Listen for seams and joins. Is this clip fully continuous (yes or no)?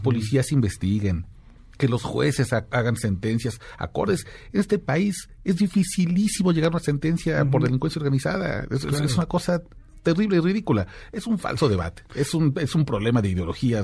yes